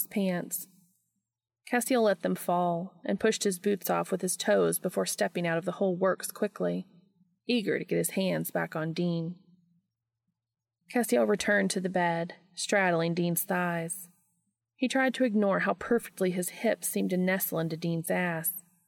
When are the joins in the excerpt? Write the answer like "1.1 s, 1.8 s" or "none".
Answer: none

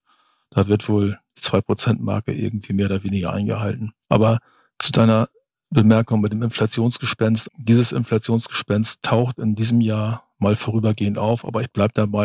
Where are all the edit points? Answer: 7.5 s

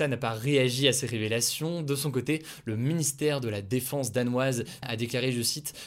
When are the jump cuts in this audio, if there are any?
4.8 s

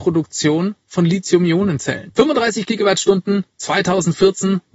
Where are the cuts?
2.1 s

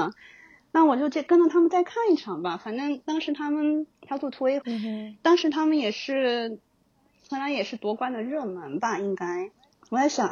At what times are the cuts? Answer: 4.6 s

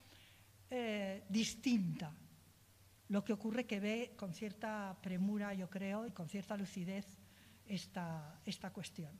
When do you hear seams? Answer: none

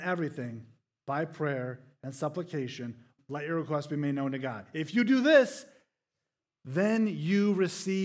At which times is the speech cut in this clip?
3.2 s

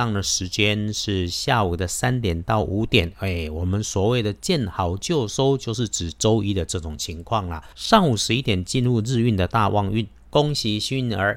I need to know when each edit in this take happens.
7.7 s, 10.3 s

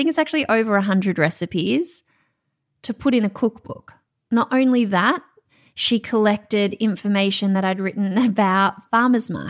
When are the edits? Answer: none

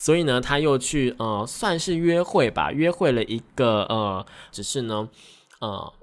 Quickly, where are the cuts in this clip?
4.5 s

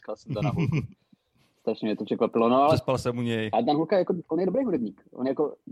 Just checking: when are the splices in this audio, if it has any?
none

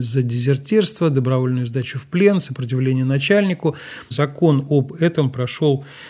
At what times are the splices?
4.1 s

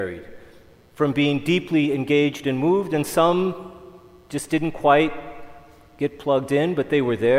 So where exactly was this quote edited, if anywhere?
none

